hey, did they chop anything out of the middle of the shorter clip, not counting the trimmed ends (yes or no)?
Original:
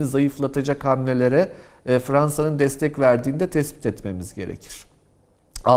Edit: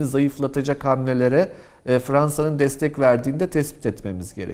no